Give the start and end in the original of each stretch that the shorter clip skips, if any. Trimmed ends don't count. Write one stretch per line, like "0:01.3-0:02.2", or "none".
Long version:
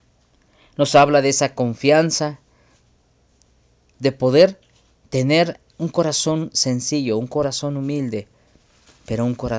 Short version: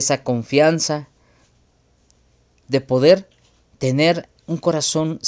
none